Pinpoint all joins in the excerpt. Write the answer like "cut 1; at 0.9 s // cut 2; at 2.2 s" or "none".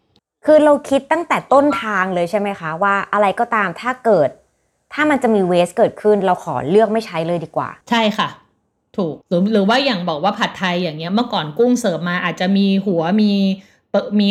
cut 1; at 7.8 s // cut 2; at 9.2 s